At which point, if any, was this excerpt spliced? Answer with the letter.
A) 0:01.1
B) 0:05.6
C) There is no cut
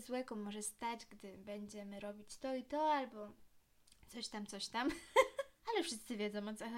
B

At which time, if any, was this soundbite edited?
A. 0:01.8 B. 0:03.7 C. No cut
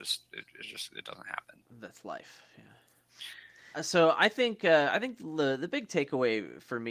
B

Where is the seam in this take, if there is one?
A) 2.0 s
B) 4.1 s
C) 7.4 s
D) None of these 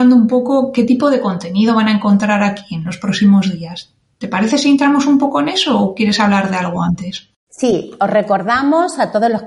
D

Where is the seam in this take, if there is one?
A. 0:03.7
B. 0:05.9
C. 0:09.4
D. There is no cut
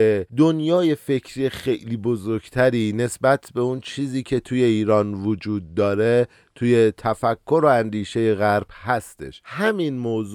C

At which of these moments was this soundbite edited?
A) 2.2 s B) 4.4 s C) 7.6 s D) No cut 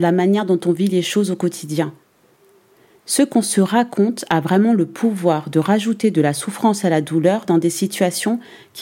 D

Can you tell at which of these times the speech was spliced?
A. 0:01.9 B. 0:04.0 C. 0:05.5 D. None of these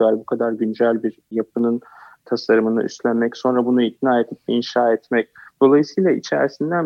C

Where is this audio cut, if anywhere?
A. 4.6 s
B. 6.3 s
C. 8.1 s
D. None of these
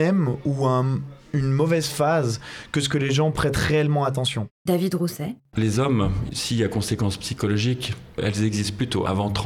A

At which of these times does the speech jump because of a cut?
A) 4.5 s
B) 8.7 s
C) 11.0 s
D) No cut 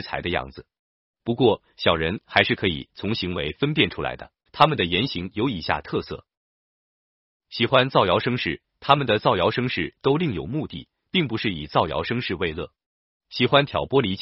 A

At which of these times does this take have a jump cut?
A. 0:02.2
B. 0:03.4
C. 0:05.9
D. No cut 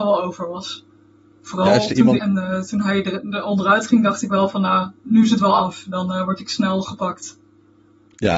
A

